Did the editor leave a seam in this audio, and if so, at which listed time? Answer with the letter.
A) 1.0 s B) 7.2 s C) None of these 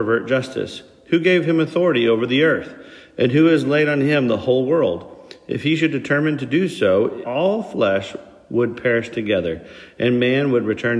B